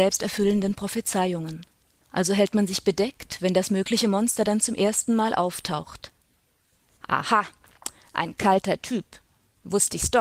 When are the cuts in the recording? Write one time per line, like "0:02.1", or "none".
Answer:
0:02.0
0:07.0